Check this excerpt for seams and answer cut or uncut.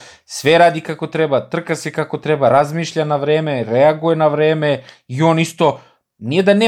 uncut